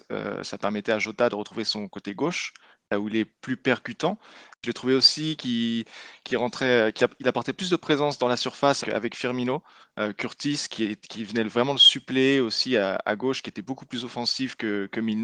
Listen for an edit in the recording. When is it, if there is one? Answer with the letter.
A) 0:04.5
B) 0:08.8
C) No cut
B